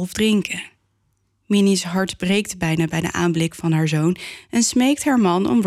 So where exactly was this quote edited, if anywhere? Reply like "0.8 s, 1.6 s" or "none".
none